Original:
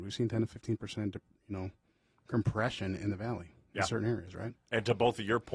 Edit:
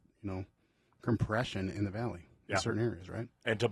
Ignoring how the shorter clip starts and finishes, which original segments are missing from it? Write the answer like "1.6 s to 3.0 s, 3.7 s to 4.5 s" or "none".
none